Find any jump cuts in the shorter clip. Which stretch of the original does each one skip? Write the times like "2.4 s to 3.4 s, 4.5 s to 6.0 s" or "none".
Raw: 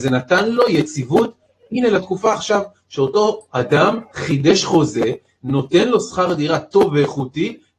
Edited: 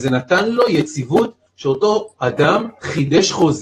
1.5 s to 2.8 s